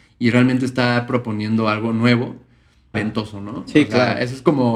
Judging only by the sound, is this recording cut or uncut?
cut